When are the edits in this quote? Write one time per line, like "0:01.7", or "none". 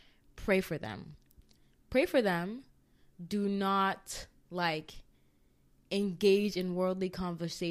none